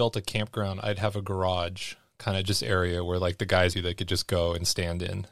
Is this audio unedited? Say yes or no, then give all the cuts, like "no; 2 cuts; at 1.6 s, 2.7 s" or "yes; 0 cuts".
no; 1 cut; at 3.7 s